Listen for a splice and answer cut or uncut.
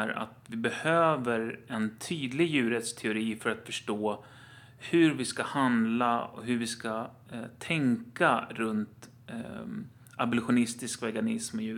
uncut